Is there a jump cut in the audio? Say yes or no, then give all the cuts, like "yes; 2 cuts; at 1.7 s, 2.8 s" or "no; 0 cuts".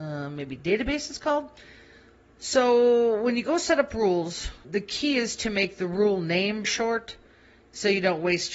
yes; 2 cuts; at 4.6 s, 6.6 s